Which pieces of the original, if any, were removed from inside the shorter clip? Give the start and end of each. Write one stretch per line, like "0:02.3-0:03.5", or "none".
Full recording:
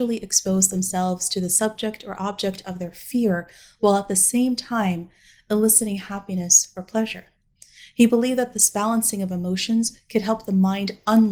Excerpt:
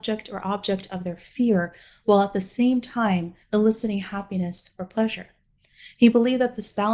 0:05.2-0:05.4